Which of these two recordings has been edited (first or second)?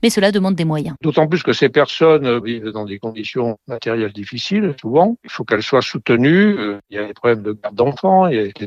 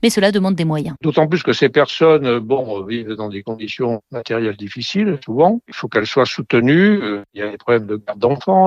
first